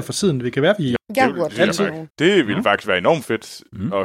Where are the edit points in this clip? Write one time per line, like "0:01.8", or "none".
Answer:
0:01.0
0:02.1

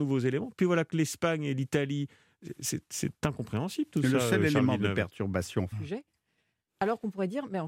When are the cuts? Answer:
0:05.7

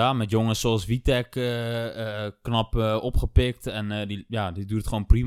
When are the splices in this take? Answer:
none

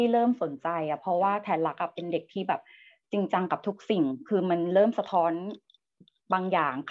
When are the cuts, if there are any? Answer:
none

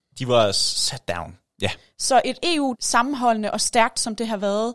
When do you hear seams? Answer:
0:01.5
0:02.7

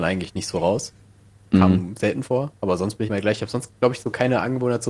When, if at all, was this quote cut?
0:03.1

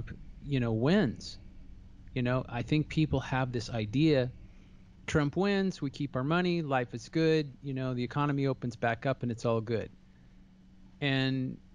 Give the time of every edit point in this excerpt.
none

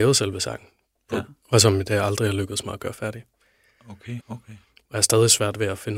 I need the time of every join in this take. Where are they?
0:01.4
0:04.2

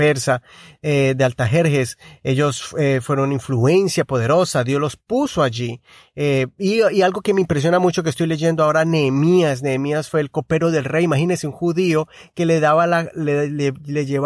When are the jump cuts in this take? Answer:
none

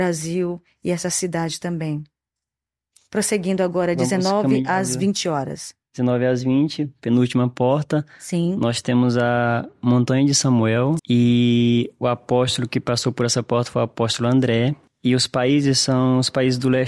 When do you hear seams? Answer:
0:11.0
0:14.9

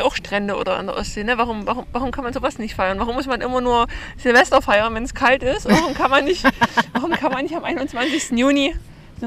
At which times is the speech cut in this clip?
none

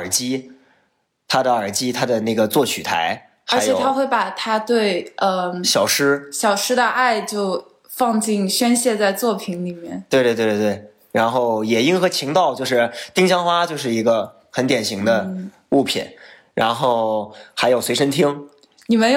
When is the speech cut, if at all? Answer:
none

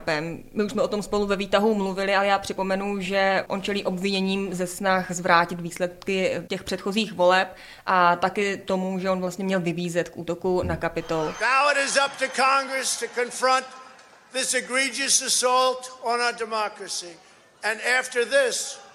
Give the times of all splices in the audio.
none

